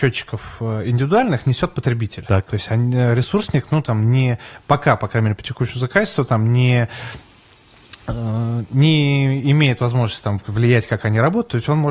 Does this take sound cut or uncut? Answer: uncut